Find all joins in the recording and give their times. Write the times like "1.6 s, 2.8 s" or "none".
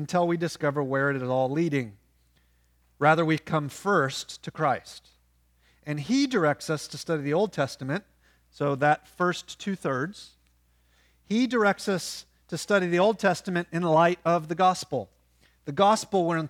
none